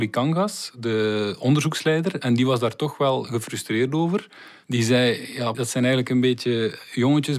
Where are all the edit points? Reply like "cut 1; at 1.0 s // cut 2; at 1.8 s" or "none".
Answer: cut 1; at 5.5 s